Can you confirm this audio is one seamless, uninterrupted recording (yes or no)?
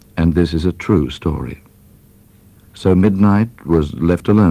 yes